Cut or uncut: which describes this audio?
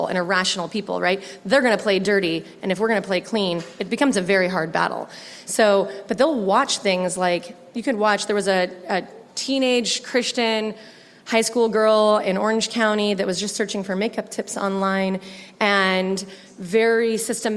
uncut